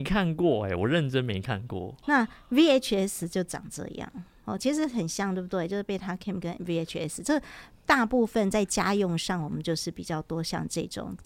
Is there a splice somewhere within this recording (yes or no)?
no